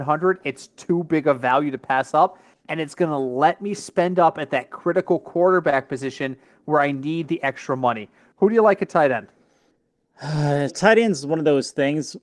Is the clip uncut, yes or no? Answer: no